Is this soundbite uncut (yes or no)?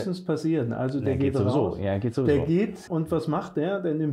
no